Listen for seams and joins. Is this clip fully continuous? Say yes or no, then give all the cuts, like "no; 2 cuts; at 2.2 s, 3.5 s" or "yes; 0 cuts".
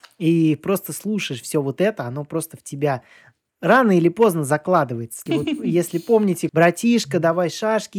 no; 2 cuts; at 5.3 s, 6.5 s